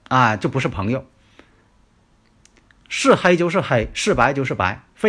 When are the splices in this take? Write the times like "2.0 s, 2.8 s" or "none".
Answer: none